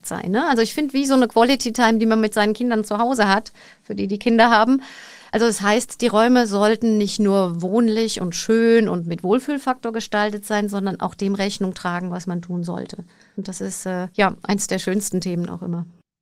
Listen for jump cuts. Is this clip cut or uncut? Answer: uncut